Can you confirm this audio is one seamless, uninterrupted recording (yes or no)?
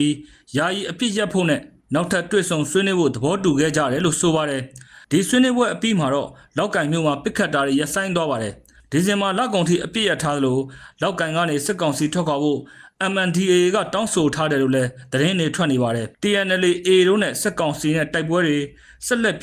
no